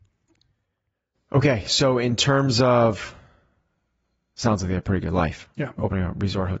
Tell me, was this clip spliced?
no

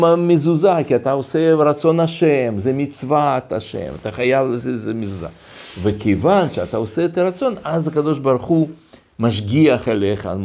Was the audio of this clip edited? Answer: no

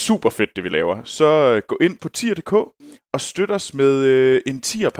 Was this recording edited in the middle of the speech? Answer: no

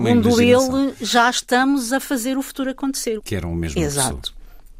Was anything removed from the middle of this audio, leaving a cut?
yes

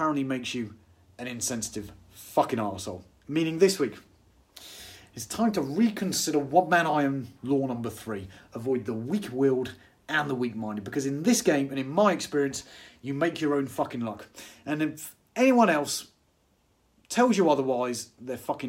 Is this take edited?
no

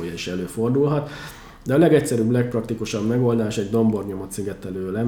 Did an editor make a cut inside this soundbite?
no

